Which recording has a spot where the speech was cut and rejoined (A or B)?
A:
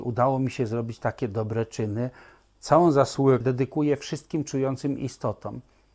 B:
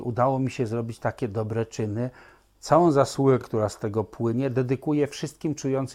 A